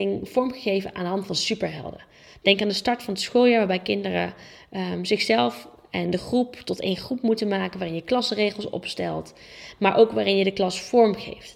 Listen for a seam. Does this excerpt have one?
no; 0 cuts

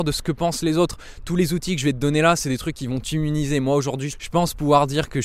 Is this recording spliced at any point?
yes; 1 cut; at 4.1 s

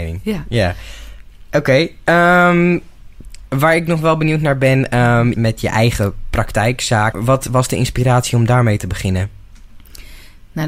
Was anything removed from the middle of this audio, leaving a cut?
yes; 2 cuts; at 5.3 s, 7.1 s

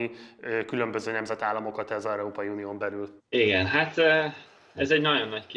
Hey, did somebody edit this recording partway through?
yes; 1 cut; at 3.2 s

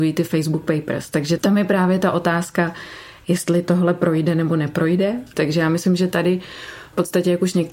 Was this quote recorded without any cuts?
no; 1 cut; at 5.3 s

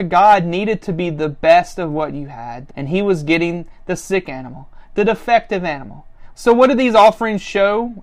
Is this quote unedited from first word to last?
no; 2 cuts; at 2.7 s, 6.3 s

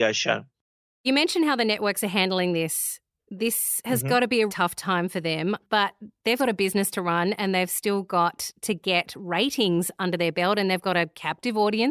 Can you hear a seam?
yes; 2 cuts; at 4.5 s, 6.4 s

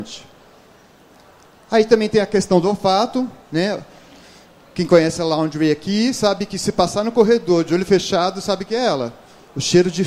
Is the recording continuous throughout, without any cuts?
yes; 0 cuts

